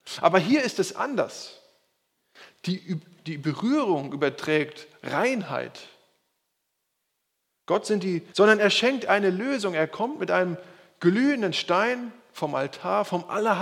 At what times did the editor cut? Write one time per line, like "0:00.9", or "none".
0:08.3